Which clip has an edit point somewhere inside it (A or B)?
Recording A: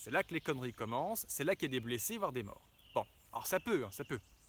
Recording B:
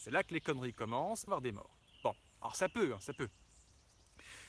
B